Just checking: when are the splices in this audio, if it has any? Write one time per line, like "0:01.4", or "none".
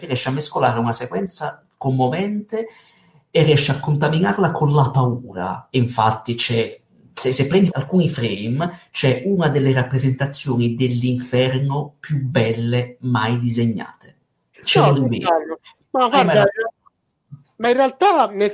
0:07.7
0:14.5